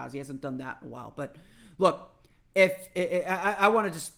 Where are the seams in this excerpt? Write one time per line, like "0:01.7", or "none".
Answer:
none